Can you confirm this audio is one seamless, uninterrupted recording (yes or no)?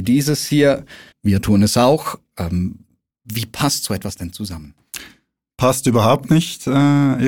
no